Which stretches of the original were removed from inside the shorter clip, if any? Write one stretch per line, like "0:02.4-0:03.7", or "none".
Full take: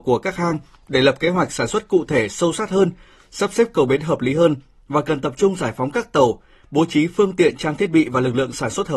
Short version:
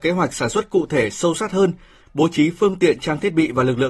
0:03.2-0:06.6